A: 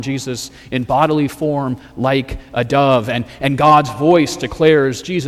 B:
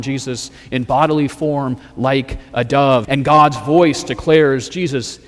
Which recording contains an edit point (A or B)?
B